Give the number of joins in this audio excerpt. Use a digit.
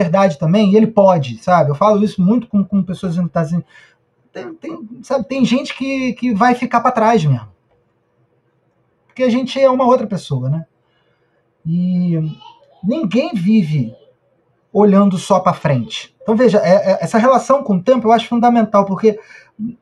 1